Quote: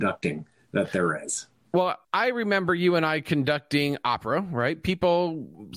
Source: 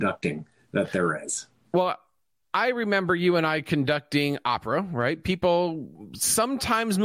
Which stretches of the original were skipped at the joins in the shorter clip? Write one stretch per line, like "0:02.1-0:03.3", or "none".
0:02.0-0:02.5